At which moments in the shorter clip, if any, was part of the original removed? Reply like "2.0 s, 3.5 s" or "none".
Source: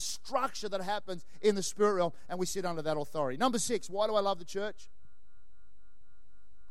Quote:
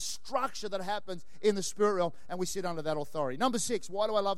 none